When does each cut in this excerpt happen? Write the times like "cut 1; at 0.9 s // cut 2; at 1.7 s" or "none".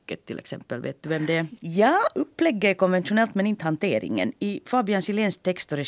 cut 1; at 1.6 s